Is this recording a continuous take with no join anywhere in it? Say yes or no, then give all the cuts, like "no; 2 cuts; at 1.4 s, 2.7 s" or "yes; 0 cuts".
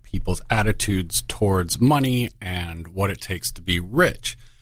yes; 0 cuts